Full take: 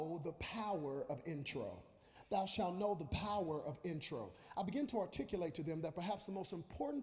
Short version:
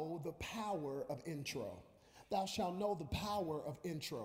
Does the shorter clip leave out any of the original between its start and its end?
no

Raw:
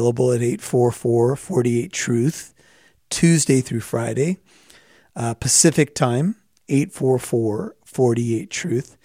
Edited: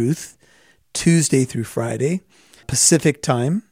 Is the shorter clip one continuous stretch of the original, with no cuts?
no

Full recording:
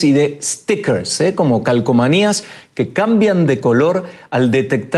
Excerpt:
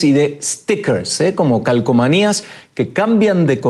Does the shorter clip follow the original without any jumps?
yes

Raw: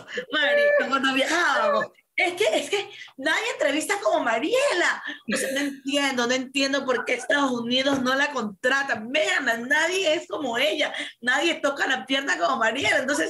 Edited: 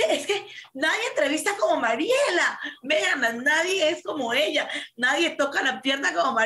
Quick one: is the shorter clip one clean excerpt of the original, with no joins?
no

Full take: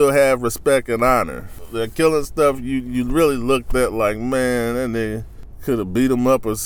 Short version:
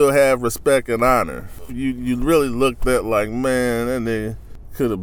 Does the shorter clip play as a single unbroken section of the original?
no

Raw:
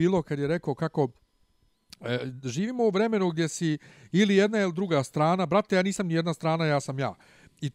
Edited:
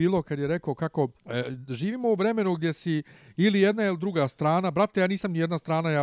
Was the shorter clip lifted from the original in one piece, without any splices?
no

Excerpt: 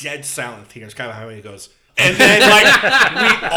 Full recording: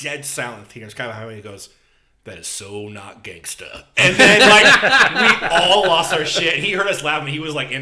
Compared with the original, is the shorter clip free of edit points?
no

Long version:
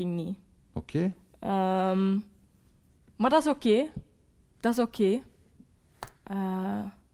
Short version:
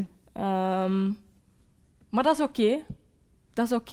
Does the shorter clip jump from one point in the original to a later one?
no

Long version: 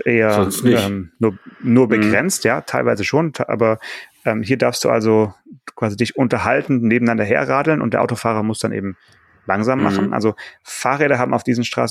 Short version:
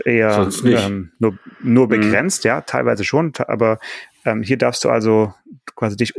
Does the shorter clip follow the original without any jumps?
yes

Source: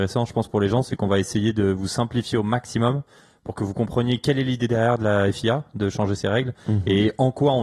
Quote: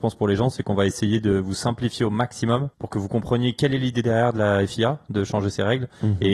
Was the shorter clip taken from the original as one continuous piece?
no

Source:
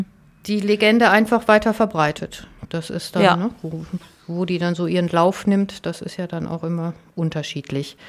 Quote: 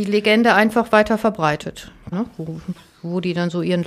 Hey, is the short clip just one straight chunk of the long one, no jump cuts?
no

